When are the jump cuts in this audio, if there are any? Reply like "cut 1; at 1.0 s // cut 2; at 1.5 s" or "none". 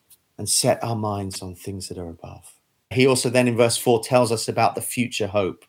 cut 1; at 2.9 s